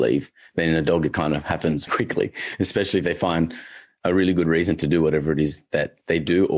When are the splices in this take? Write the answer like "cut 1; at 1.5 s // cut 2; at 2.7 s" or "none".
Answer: cut 1; at 1.9 s